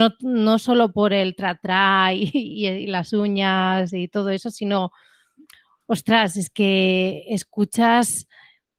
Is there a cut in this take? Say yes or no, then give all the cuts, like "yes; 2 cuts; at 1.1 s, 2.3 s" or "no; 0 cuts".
no; 0 cuts